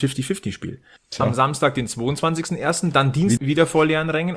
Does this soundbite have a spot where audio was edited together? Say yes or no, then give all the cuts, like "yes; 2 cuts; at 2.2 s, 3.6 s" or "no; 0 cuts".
yes; 2 cuts; at 1.0 s, 3.4 s